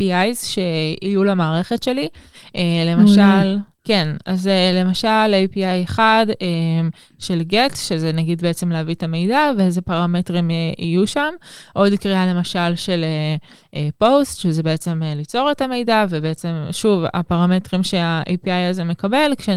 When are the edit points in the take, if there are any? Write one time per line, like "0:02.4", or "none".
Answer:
0:03.8